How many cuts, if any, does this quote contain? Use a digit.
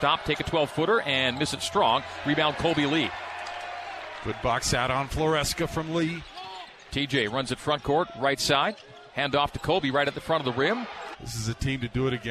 2